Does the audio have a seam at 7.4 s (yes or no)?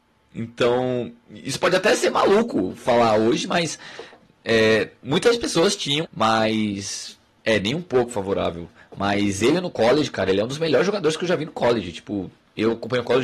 no